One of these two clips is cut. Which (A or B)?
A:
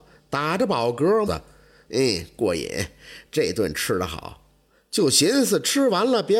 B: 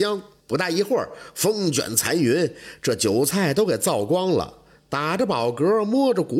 A